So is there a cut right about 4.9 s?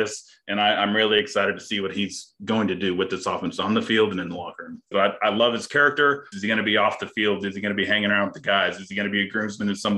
yes; 2 cuts; at 4.9 s, 6.3 s

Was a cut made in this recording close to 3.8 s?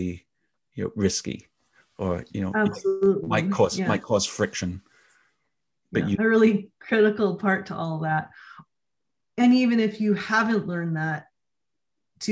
no; 1 cut; at 6.2 s

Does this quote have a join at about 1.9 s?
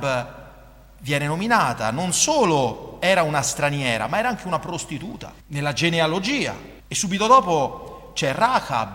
no; 2 cuts; at 5.4 s, 6.8 s

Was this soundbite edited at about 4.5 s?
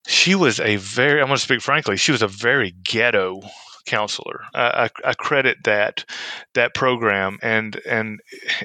yes; 2 cuts; at 4.5 s, 7.4 s

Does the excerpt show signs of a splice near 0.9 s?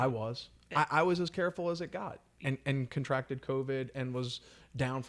no; 0 cuts

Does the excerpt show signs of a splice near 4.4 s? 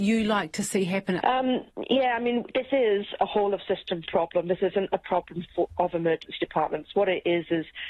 no; 1 cut; at 1.2 s

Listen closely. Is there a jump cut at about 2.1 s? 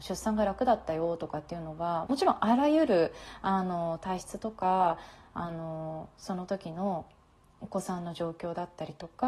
yes; 1 cut; at 2.1 s

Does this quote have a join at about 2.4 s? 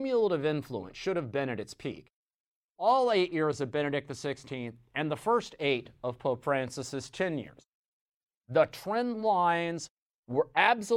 no; 0 cuts

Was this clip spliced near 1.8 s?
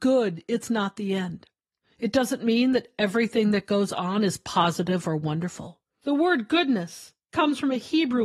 yes; 2 cuts; at 1.8 s, 5.9 s

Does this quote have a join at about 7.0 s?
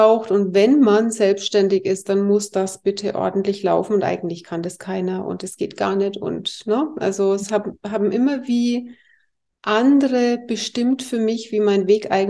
no; 0 cuts

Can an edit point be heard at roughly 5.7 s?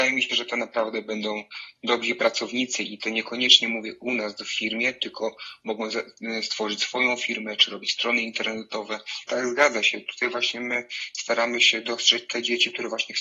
no; 1 cut; at 9.3 s

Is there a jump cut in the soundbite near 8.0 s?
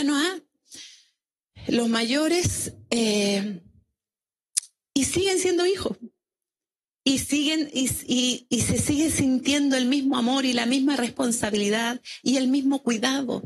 no; 0 cuts

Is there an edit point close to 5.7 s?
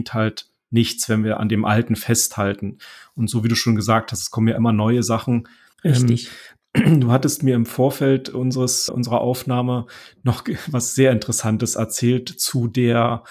yes; 2 cuts; at 5.7 s, 8.9 s

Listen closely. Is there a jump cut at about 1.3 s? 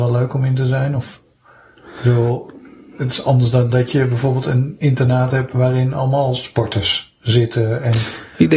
no; 0 cuts

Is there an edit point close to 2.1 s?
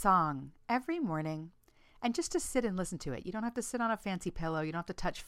no; 0 cuts

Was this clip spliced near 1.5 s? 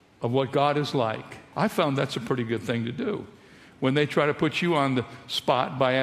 yes; 1 cut; at 1.5 s

